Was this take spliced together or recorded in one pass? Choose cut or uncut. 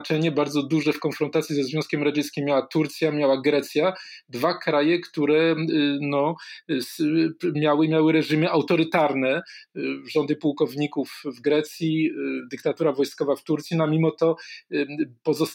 uncut